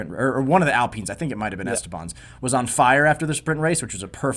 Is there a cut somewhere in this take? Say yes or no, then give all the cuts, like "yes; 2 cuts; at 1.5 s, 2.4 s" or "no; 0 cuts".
no; 0 cuts